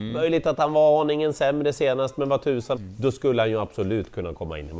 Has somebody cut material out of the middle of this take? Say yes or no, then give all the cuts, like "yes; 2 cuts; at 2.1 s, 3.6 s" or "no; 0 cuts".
yes; 1 cut; at 2.8 s